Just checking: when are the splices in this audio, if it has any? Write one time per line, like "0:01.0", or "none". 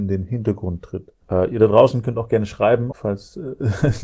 0:01.2
0:02.9